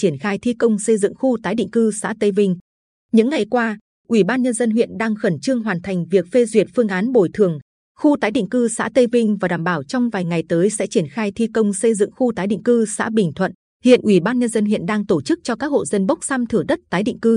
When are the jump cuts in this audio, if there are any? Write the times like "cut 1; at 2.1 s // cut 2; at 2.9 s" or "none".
cut 1; at 2.9 s // cut 2; at 7.8 s // cut 3; at 13.8 s